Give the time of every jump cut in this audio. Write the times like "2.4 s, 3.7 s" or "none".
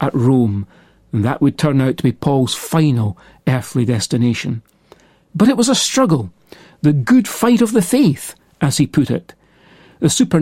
none